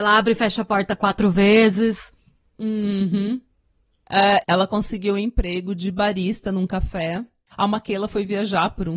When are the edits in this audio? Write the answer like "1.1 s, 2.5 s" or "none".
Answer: 4.4 s, 7.5 s